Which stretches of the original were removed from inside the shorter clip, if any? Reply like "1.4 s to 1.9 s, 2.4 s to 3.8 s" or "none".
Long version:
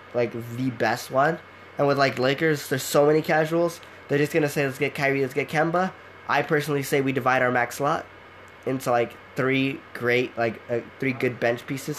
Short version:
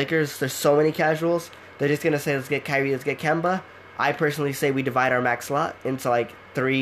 8.1 s to 8.6 s